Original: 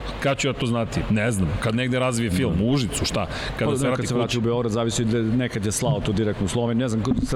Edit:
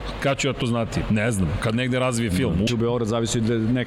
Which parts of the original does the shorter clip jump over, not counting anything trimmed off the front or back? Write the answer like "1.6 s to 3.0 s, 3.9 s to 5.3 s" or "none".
2.7 s to 4.3 s

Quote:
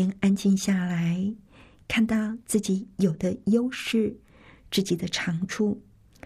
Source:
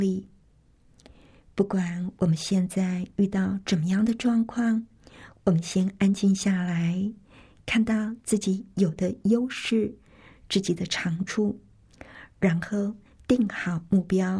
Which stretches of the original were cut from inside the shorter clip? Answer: none

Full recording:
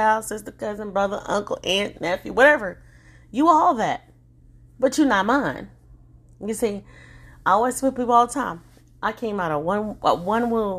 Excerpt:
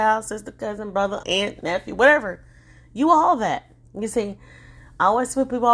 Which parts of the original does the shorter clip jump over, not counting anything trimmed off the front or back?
1.2 s to 1.6 s, 4.2 s to 6.3 s

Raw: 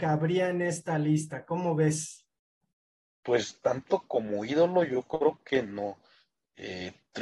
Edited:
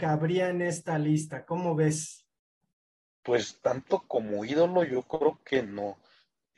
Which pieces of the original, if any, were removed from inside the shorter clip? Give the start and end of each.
none

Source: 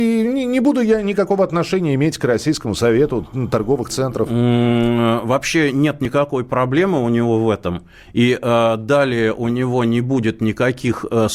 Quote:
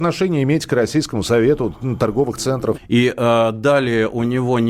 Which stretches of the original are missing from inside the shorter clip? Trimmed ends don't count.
4.3 s to 8.0 s

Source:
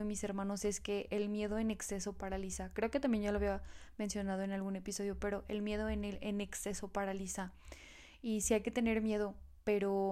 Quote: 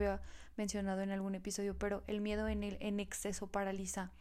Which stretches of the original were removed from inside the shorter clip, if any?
none

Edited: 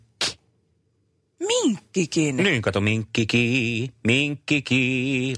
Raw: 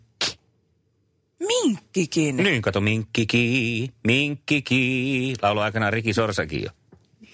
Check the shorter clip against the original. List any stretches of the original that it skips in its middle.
none

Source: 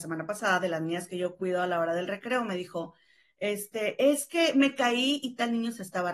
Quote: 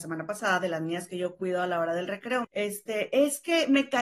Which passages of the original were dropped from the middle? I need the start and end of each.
2.4 s to 3.3 s

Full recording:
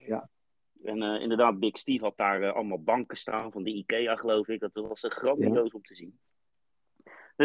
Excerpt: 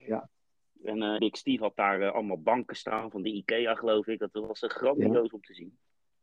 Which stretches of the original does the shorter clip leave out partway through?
1.2 s to 1.6 s

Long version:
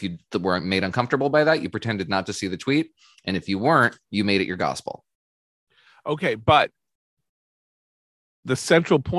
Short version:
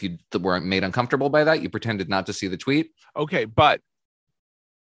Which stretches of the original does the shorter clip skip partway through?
3.0 s to 5.9 s

